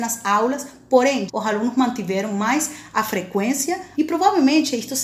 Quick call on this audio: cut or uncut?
cut